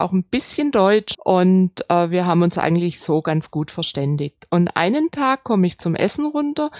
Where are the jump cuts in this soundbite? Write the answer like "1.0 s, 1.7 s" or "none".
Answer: 1.1 s